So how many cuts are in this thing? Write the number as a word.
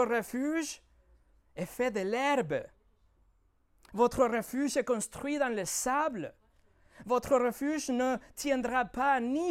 zero